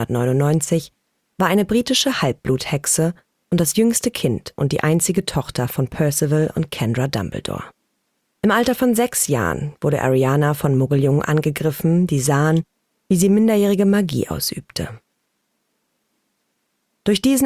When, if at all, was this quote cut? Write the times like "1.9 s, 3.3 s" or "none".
8.4 s